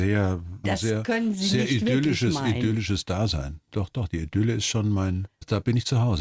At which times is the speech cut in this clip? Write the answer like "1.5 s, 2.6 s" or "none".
none